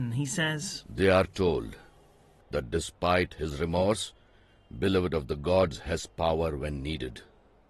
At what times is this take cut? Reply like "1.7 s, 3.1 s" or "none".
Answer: none

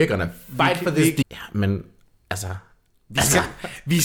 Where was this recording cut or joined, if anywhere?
1.2 s

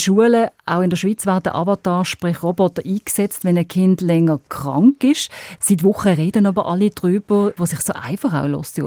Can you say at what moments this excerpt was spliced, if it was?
5.6 s, 7.6 s

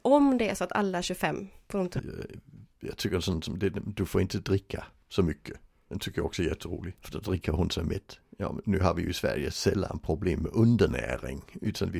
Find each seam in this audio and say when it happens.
2.0 s, 7.0 s

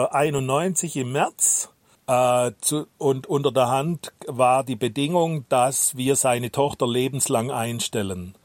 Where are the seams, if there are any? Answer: 1.9 s

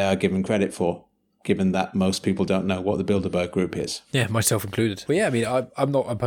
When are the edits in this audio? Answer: 5.1 s

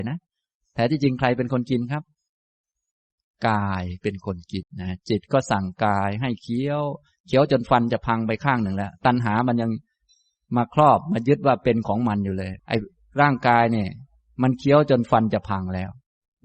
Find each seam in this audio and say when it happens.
4.6 s, 12.6 s

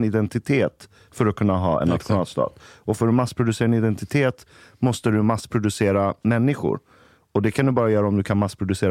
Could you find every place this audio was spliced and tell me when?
none

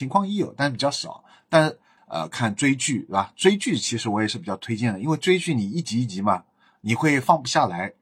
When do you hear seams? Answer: 2.0 s

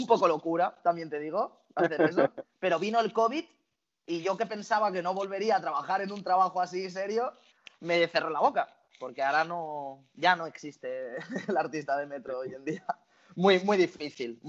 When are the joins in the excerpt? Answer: none

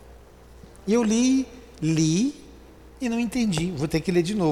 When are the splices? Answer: none

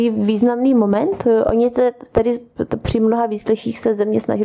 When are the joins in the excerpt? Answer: none

